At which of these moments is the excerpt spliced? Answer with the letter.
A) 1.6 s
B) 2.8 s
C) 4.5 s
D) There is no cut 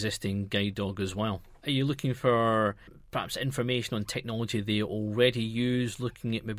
A